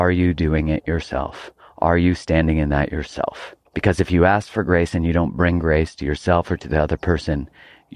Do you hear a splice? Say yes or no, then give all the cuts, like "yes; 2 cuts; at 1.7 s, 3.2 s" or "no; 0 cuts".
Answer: yes; 1 cut; at 3.7 s